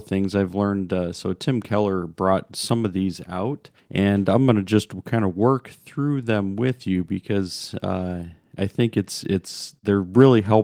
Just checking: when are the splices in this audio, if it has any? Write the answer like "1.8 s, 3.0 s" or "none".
none